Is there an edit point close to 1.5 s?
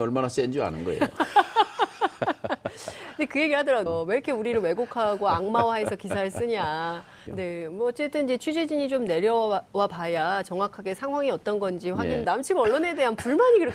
no; 3 cuts; at 3.9 s, 7.3 s, 12.2 s

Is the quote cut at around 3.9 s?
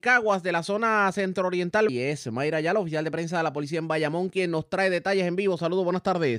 no; 1 cut; at 1.9 s

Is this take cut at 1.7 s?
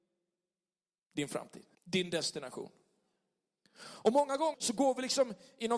yes; 2 cuts; at 1.7 s, 4.5 s

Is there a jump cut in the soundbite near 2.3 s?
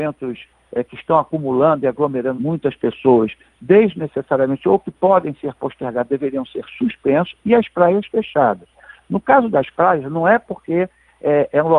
yes; 1 cut; at 2.3 s

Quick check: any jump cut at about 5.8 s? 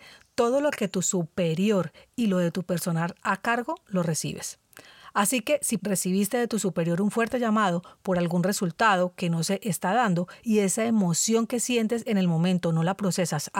yes; 1 cut; at 5.8 s

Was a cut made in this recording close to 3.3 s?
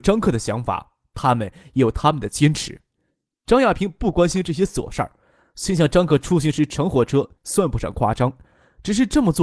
no; 1 cut; at 7.4 s

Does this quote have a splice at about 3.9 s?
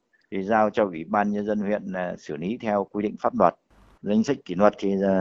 yes; 1 cut; at 3.9 s

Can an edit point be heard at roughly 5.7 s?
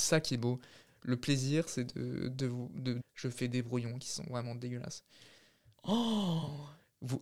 yes; 2 cuts; at 3.0 s, 5.7 s

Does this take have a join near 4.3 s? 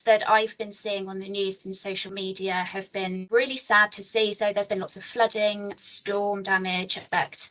no; 0 cuts

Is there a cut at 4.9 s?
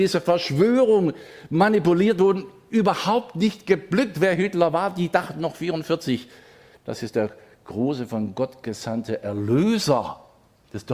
no; 0 cuts

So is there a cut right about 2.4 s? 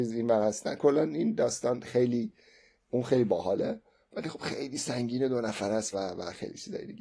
no; 1 cut; at 5.9 s

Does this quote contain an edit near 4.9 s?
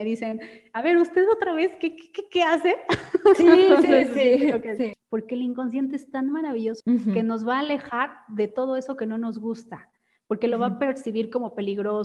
yes; 2 cuts; at 4.9 s, 6.8 s

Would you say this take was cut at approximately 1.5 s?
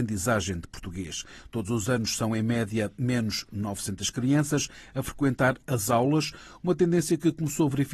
no; 0 cuts

